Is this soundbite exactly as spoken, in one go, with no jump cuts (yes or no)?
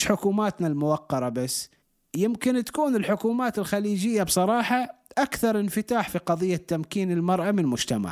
yes